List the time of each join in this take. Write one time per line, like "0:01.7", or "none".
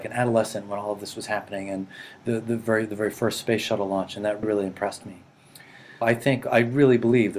0:04.4
0:06.0